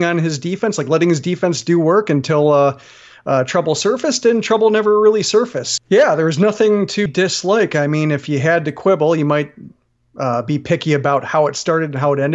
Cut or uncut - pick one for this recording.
cut